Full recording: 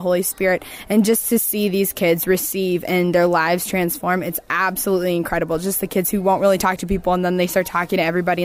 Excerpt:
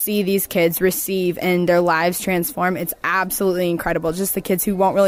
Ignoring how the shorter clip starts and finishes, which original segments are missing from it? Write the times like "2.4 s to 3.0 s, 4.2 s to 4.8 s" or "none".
none